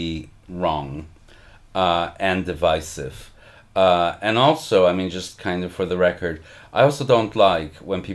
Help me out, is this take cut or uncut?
uncut